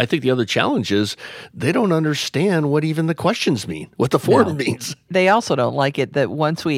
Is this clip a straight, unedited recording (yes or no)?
yes